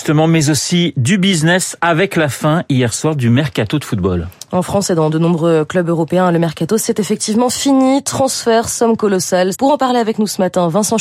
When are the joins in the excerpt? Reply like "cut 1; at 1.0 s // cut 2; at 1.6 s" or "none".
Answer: cut 1; at 9.5 s